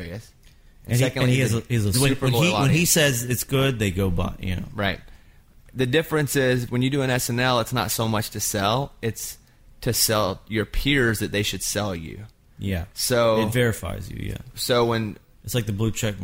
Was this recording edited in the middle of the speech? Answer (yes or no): yes